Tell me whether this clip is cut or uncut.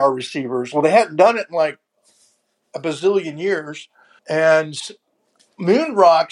cut